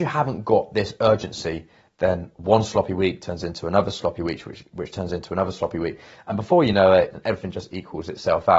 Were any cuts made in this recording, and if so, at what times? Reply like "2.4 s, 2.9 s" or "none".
7.1 s